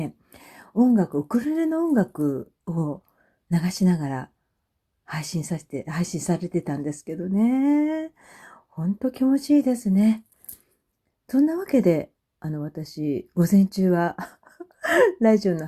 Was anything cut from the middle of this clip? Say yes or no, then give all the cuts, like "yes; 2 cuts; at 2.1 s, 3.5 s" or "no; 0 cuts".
no; 0 cuts